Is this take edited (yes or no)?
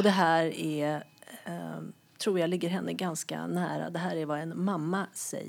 no